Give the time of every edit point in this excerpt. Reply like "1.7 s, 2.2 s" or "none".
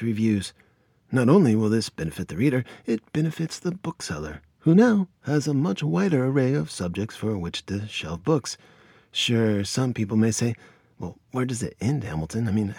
none